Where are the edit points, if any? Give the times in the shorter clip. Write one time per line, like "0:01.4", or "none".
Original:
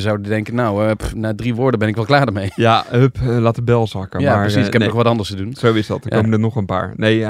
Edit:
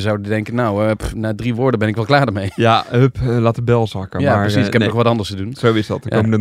none